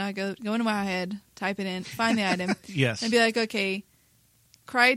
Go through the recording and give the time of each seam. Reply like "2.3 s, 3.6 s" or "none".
none